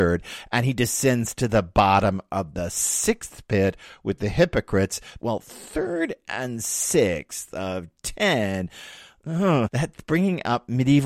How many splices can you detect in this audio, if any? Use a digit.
1